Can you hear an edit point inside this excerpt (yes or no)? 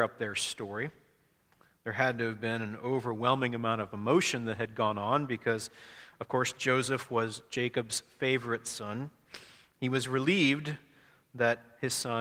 no